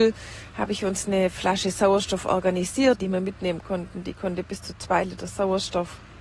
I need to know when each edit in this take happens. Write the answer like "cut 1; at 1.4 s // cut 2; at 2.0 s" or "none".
cut 1; at 3.0 s